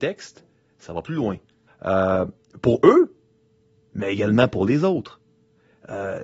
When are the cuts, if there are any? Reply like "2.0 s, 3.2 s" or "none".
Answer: 1.7 s